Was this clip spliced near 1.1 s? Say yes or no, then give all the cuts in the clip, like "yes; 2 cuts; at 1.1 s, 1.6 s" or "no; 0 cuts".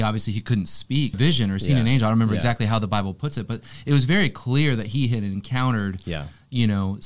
yes; 1 cut; at 1.1 s